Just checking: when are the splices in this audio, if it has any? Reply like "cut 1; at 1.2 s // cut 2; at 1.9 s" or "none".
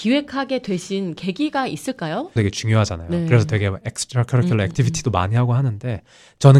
cut 1; at 2.4 s